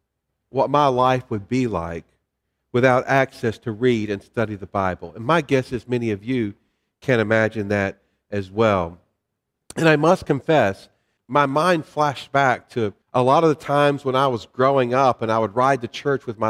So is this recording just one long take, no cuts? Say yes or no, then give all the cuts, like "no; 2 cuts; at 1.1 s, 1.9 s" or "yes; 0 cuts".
no; 2 cuts; at 11.2 s, 13.0 s